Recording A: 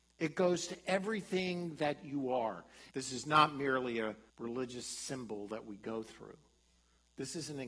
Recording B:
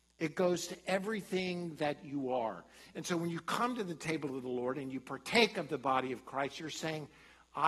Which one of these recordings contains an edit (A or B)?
A